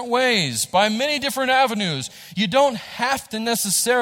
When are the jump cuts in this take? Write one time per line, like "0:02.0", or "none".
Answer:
none